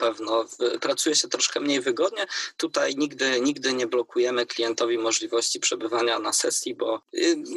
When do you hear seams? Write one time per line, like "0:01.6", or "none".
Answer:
none